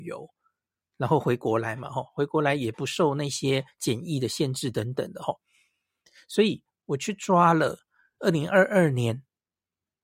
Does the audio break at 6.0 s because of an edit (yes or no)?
no